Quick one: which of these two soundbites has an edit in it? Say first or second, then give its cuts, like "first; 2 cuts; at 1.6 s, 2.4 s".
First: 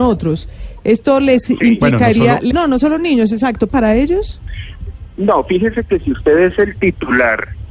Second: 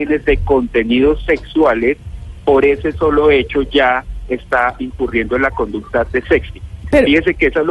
first; 2 cuts; at 2.5 s, 3.7 s